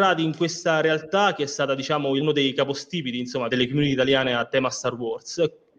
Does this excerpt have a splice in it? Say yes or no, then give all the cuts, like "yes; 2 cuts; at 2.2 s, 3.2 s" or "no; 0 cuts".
yes; 2 cuts; at 2.2 s, 3.5 s